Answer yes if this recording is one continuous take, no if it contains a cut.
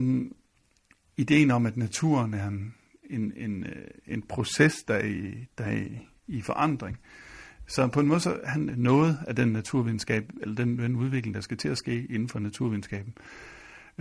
no